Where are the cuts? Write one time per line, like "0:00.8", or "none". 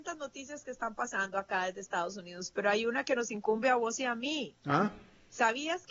none